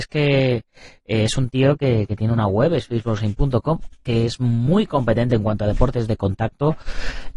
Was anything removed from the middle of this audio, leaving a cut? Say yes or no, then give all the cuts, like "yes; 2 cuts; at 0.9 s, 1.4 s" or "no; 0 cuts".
no; 0 cuts